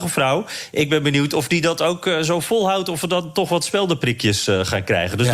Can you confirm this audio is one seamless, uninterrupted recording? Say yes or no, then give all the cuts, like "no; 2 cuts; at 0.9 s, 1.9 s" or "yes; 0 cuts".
yes; 0 cuts